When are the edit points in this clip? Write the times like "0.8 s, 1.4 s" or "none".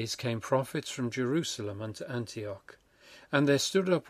none